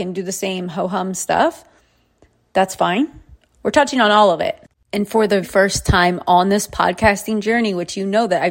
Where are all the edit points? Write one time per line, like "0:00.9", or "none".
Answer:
0:03.5
0:05.4